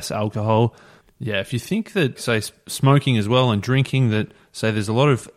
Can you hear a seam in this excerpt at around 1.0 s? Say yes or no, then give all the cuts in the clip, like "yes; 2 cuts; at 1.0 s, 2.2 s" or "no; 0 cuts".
yes; 2 cuts; at 1.0 s, 2.2 s